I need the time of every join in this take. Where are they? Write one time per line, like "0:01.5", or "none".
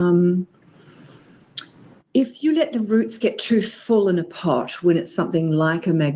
none